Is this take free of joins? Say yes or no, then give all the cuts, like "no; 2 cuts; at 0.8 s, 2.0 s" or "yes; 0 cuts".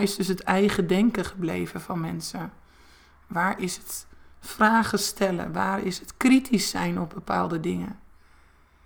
yes; 0 cuts